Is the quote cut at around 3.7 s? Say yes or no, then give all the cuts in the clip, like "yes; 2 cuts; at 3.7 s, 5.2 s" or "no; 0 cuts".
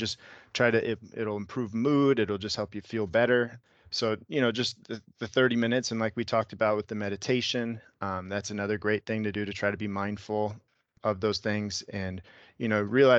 no; 0 cuts